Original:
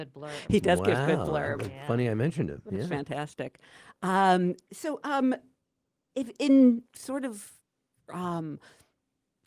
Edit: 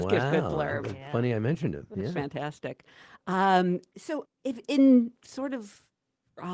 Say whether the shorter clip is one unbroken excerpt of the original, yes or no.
no